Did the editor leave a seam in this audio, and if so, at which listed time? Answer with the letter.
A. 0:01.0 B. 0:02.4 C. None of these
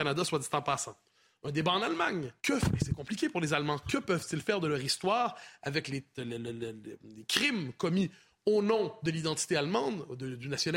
B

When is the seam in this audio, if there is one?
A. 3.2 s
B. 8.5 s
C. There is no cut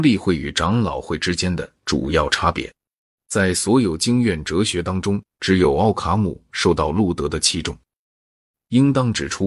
A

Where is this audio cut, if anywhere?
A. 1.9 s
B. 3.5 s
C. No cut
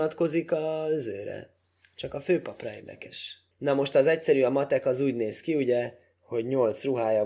B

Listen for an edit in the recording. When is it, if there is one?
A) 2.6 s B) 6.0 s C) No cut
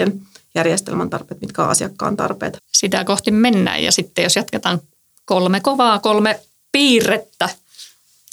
A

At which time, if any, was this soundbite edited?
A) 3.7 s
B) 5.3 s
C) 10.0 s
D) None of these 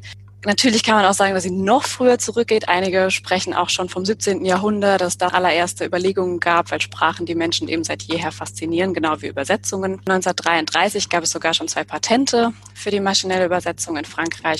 B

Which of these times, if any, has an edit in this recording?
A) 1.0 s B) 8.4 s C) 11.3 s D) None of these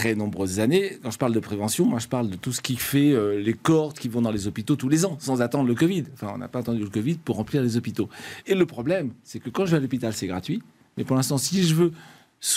B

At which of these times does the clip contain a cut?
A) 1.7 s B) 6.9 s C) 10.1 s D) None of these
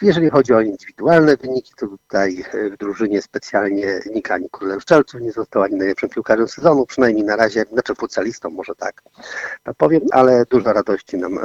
C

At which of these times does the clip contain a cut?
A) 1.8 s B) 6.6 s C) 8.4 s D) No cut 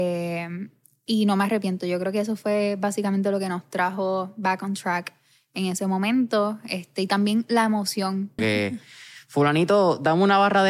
C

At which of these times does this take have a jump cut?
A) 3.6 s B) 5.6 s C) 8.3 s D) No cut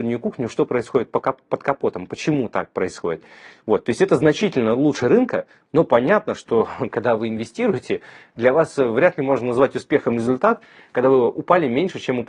A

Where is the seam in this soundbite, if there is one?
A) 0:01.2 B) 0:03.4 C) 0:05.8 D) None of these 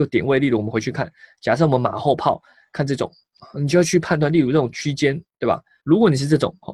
C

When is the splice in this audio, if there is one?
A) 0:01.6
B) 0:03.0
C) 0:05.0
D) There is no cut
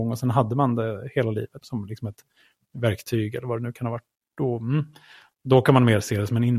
A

